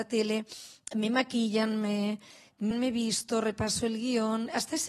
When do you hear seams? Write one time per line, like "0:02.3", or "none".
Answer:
0:02.7